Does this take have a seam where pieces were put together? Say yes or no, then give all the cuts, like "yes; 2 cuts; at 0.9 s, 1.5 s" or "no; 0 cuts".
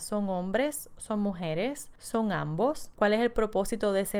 no; 0 cuts